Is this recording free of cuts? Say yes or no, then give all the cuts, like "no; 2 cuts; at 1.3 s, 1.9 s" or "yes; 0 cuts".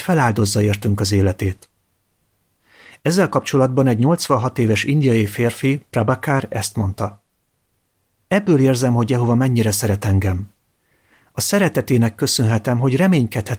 yes; 0 cuts